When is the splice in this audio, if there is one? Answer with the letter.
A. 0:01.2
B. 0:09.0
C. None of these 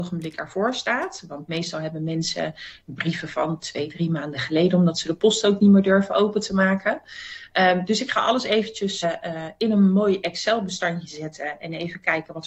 B